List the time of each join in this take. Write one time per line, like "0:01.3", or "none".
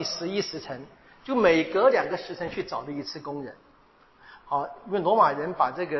none